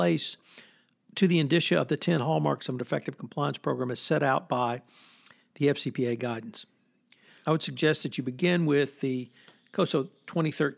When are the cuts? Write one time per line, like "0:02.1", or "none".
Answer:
0:07.4